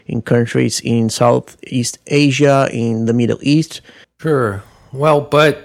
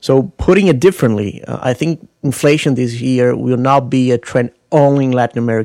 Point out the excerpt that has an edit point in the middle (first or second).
first